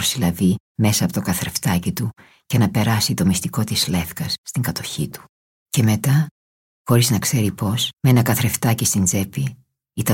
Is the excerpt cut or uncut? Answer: cut